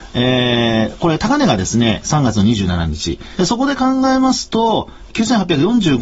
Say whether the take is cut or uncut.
cut